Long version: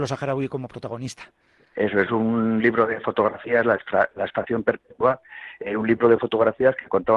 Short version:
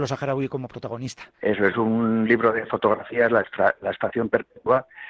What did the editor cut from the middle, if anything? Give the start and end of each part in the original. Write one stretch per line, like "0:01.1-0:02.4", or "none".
0:01.3-0:01.7